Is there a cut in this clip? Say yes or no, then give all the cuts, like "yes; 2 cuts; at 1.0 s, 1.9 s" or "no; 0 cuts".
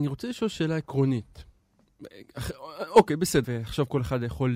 yes; 1 cut; at 3.4 s